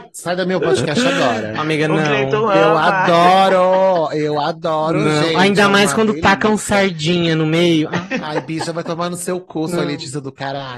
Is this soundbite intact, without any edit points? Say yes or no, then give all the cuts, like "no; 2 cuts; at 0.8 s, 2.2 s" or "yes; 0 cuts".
yes; 0 cuts